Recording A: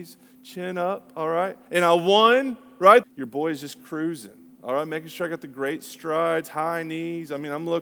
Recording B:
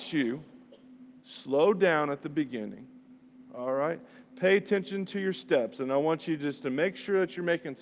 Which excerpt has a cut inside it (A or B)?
A